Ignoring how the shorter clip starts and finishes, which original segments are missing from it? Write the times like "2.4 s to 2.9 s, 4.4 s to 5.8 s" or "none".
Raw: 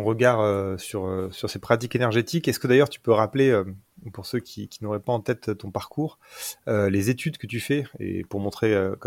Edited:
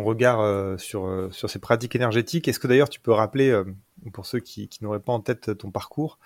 none